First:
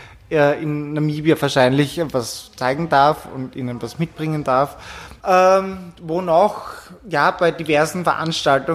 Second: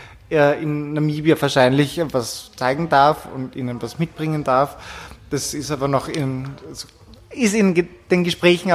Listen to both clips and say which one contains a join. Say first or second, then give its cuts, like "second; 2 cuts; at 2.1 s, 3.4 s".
first; 1 cut; at 5.2 s